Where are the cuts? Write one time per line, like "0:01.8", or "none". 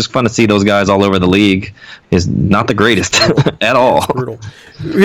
0:02.0